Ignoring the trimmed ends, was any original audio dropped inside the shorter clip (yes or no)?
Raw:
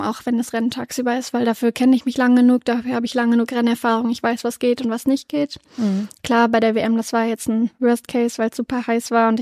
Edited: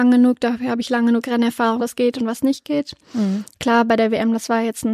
yes